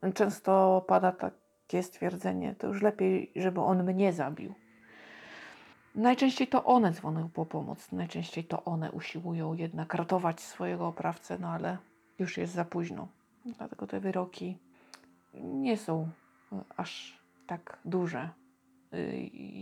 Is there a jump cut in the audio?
no; 0 cuts

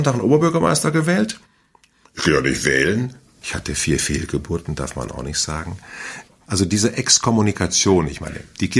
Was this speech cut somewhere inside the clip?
yes; 1 cut; at 3.4 s

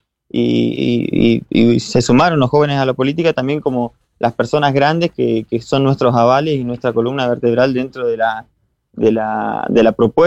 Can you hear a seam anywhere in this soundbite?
no; 0 cuts

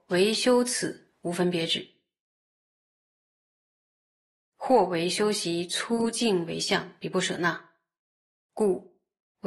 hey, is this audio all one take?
yes; 0 cuts

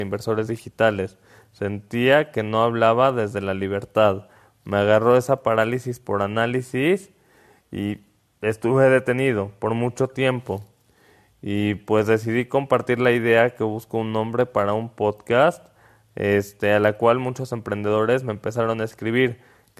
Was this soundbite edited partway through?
no; 0 cuts

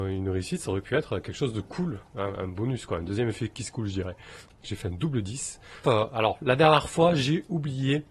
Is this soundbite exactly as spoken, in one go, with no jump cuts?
no; 2 cuts; at 4.6 s, 5.8 s

